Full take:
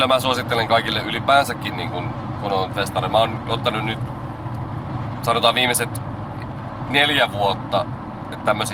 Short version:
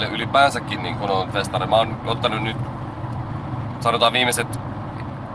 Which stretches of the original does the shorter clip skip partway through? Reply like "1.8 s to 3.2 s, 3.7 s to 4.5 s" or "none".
1.9 s to 2.4 s